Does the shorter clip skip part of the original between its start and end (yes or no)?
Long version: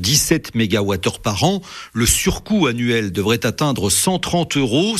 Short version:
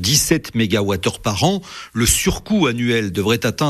no